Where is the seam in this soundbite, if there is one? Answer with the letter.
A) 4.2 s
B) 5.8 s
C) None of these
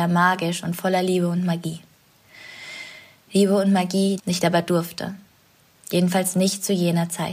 A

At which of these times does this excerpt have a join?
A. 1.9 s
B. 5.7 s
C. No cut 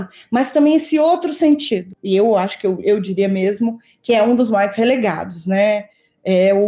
C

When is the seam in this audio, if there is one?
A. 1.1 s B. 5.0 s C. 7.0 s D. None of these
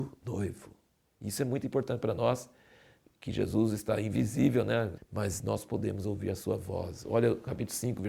B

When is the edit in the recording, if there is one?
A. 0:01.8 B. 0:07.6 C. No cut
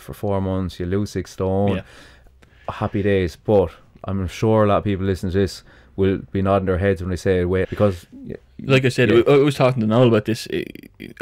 B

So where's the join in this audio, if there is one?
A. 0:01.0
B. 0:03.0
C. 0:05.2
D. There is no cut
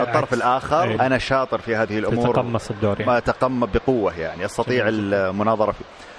A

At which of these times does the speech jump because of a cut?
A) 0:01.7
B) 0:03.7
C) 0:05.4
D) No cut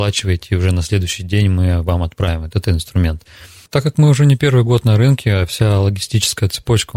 B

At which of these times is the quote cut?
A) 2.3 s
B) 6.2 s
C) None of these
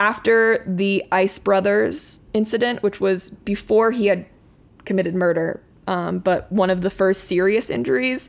A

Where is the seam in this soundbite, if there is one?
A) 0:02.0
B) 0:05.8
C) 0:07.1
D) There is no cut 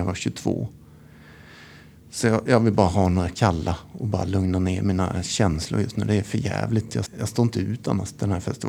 C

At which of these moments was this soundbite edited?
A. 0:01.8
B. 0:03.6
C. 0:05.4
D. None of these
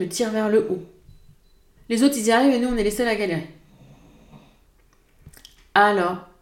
A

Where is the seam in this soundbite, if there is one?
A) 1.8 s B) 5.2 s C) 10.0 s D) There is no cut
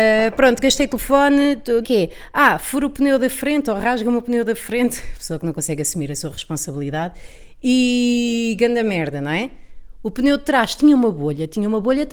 A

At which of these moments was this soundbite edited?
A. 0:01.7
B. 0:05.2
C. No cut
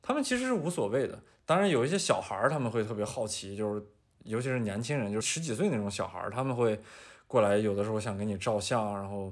B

